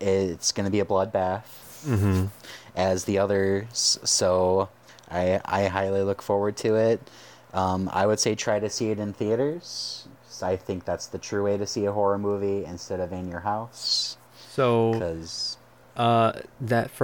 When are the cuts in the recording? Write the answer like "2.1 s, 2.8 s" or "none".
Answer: none